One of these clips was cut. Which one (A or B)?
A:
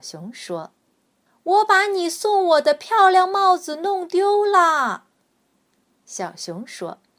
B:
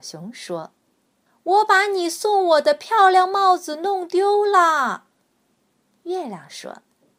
B